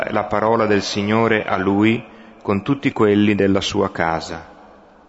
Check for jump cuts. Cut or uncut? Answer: uncut